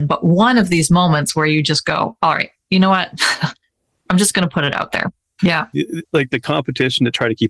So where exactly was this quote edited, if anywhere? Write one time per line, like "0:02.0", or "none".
0:05.4